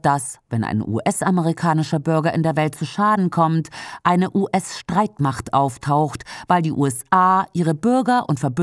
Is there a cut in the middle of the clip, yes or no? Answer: no